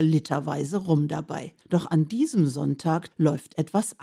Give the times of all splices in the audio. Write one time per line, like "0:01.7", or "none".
0:01.6
0:03.1